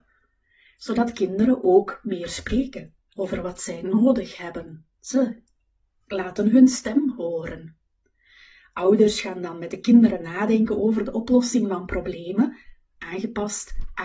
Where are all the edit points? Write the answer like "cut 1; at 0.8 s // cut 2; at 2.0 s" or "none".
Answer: cut 1; at 4.9 s